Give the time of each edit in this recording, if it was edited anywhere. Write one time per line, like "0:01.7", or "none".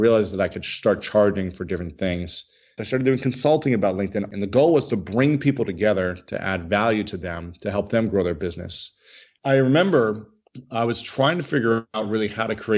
0:02.8
0:04.3
0:09.4